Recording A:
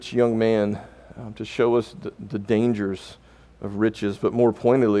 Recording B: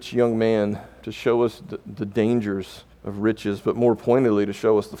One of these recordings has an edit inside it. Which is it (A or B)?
B